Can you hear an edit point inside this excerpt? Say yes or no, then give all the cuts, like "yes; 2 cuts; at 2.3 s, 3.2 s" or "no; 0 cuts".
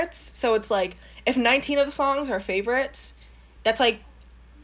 no; 0 cuts